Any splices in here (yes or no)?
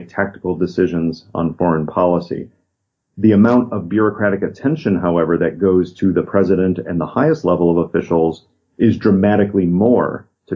no